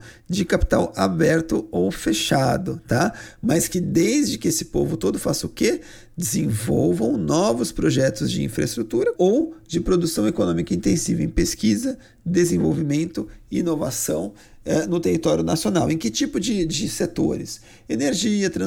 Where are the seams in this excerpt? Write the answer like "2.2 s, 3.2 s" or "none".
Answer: 9.1 s